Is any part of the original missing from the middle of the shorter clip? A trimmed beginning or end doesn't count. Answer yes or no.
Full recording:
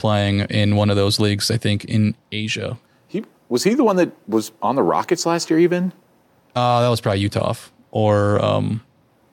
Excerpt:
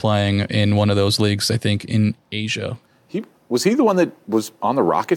no